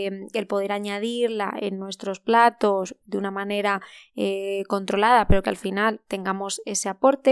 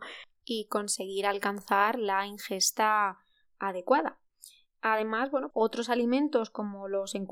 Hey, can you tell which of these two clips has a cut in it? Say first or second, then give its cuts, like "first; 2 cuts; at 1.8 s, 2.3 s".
second; 1 cut; at 5.5 s